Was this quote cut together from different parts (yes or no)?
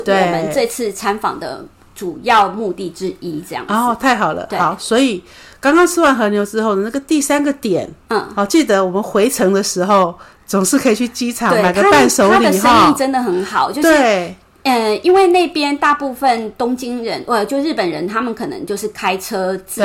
no